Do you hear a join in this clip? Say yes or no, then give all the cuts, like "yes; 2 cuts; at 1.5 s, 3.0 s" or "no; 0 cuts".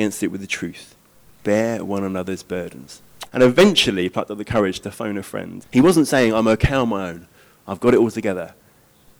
yes; 2 cuts; at 3.3 s, 5.6 s